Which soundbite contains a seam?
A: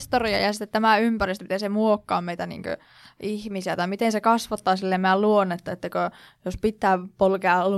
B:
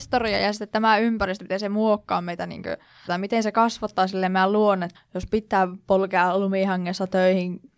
B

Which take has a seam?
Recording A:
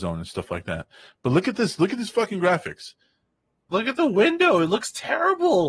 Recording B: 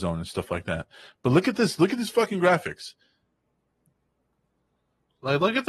A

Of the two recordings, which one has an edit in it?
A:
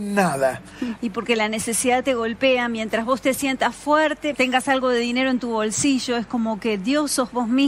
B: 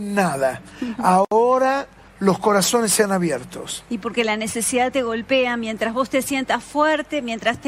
A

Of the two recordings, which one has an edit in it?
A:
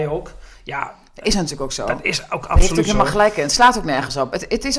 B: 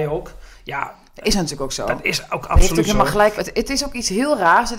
B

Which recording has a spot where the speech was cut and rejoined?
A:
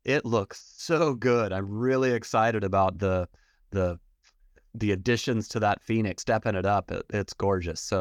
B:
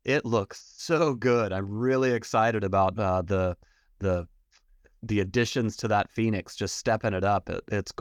A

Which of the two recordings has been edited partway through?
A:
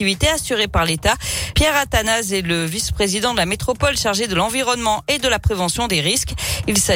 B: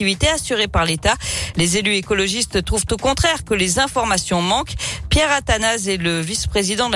A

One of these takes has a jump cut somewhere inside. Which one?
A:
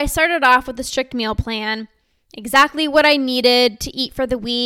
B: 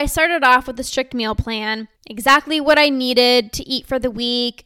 B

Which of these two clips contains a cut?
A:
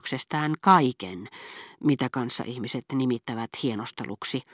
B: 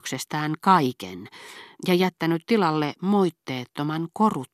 B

